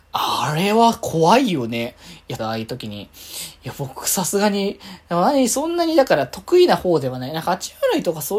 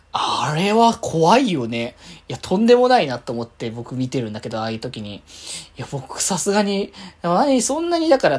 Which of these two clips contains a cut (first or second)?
first